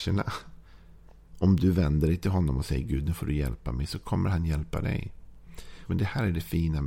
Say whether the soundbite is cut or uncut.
cut